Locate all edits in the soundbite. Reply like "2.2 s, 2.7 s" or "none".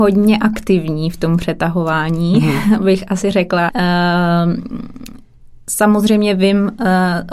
3.7 s